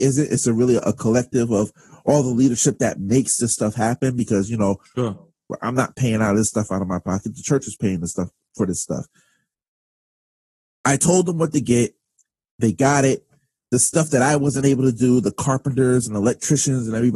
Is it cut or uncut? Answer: uncut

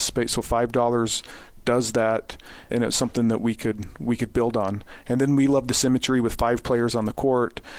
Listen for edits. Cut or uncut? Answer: cut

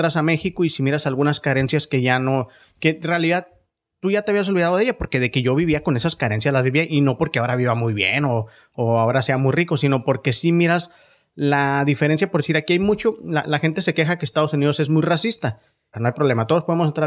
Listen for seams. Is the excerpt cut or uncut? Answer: cut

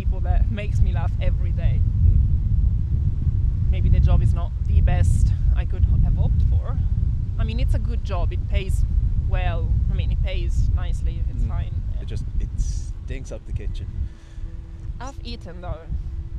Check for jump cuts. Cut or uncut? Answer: cut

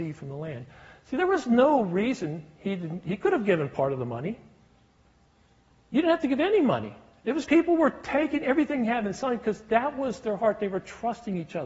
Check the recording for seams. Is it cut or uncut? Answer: cut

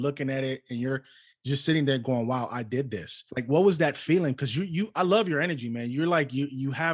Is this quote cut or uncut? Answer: cut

